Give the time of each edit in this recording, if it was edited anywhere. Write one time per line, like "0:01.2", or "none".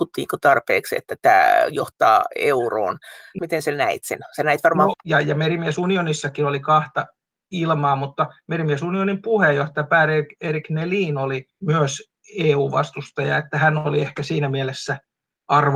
0:03.4
0:04.9
0:11.5